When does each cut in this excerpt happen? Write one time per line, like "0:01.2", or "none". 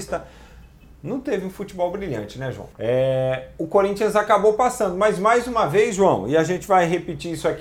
0:02.7